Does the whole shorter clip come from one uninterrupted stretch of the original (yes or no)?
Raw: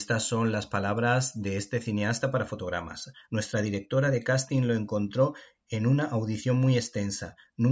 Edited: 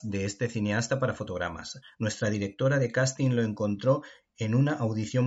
yes